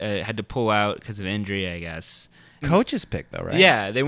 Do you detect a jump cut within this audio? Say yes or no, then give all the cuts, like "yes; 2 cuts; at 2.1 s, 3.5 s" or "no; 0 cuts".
yes; 1 cut; at 2.6 s